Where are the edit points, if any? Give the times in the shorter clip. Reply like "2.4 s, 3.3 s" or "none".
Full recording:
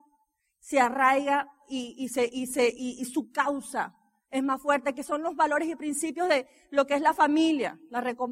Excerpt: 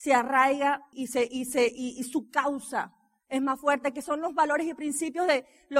0.9 s